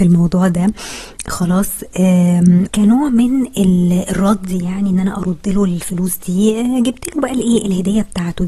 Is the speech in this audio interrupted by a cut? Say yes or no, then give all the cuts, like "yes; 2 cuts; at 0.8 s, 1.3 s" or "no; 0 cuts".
yes; 1 cut; at 2.7 s